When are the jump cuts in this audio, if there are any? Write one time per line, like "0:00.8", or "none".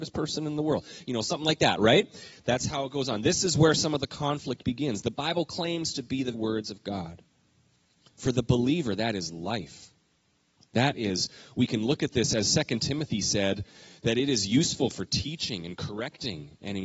0:06.3